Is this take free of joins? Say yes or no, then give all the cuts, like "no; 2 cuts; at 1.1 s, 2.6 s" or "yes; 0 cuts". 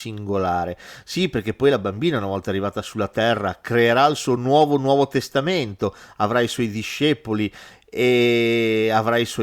yes; 0 cuts